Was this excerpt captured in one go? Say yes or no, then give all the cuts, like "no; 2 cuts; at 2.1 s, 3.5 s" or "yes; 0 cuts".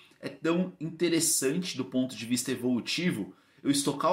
yes; 0 cuts